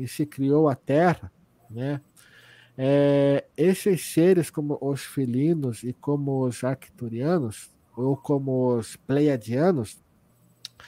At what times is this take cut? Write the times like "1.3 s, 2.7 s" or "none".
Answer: none

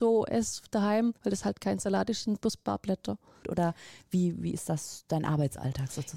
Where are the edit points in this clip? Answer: 1.2 s, 3.4 s

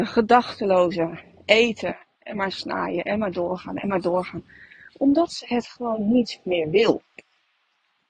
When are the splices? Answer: none

